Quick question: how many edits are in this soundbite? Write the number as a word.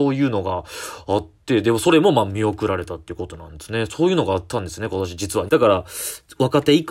one